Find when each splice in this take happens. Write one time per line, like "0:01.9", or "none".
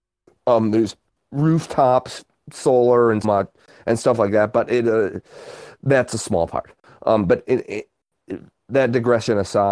0:03.2